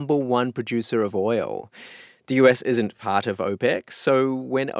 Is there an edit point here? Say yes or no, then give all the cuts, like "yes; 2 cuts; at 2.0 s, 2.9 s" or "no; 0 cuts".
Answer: no; 0 cuts